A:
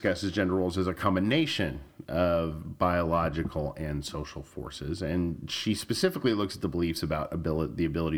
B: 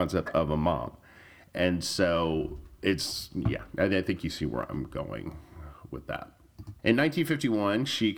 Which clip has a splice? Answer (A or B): B